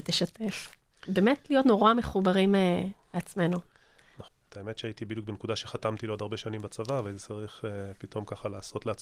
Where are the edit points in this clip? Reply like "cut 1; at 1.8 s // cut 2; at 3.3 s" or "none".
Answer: cut 1; at 4.3 s